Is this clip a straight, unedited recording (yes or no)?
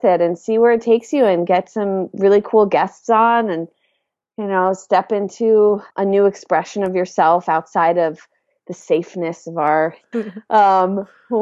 no